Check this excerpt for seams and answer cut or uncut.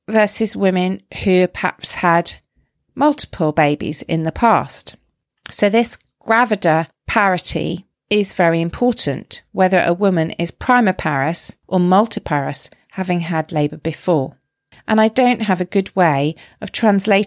cut